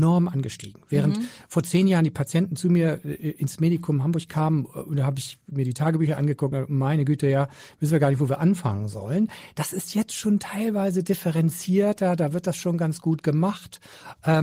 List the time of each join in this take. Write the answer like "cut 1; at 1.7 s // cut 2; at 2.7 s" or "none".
none